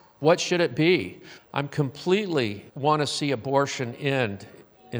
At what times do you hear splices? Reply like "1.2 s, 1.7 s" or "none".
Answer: 1.4 s, 2.7 s